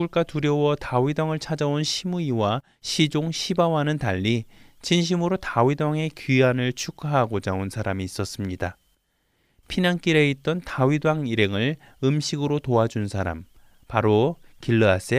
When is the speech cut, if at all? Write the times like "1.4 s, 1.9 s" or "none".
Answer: none